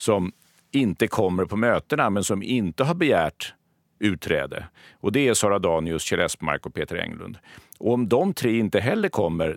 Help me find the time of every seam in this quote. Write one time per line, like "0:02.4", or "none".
none